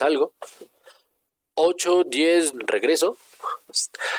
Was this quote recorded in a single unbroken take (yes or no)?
no